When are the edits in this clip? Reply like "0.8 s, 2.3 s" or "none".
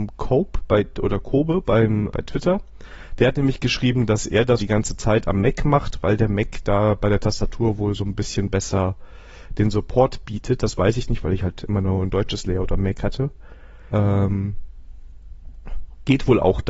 2.1 s, 4.6 s, 13.9 s